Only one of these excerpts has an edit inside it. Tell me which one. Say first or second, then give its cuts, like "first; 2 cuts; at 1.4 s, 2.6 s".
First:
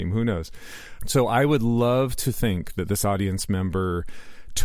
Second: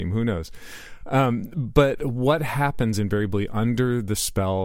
first; 1 cut; at 1.0 s